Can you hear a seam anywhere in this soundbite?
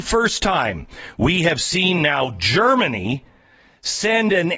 no; 0 cuts

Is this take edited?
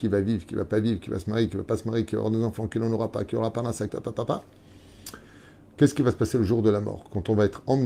yes; 1 cut; at 3.9 s

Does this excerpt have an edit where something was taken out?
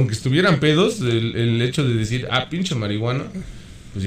no; 0 cuts

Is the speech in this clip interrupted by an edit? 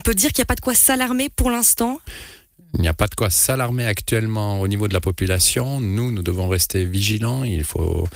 no; 0 cuts

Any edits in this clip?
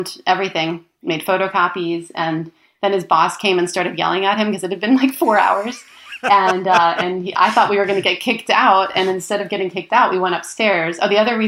no; 0 cuts

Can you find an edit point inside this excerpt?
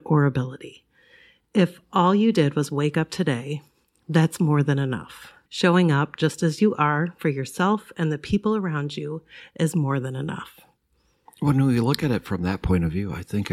yes; 2 cuts; at 5.5 s, 11.3 s

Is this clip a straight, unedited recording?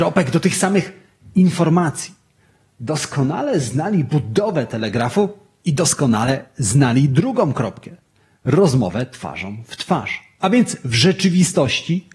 yes; 0 cuts

